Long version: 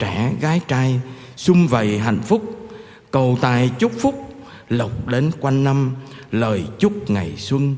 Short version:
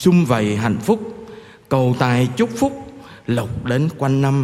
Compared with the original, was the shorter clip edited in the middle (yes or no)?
no